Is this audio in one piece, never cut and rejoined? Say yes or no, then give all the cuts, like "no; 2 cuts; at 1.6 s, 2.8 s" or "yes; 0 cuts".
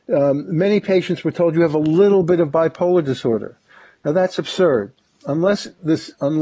yes; 0 cuts